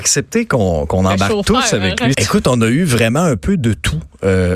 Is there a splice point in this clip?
yes; 1 cut; at 2.1 s

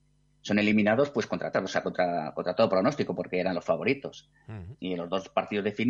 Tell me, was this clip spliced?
yes; 2 cuts; at 1.5 s, 4.8 s

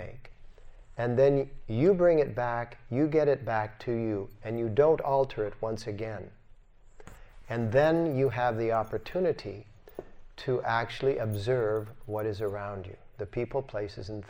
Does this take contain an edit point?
no; 0 cuts

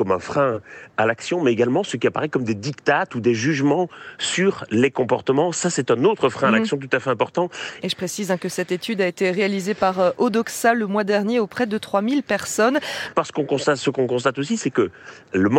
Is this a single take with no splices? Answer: no; 2 cuts; at 7.8 s, 13.1 s

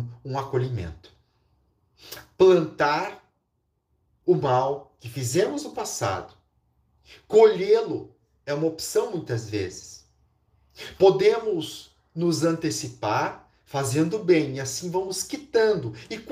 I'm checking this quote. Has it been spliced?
no; 0 cuts

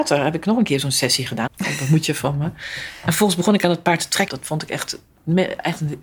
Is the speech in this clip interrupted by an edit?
yes; 2 cuts; at 1.5 s, 4.3 s

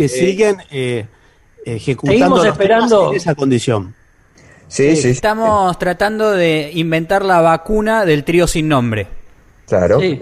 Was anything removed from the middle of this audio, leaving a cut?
no; 0 cuts

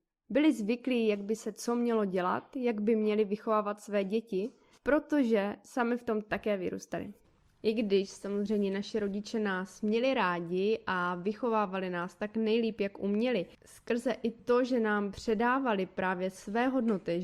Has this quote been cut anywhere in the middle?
yes; 1 cut; at 13.5 s

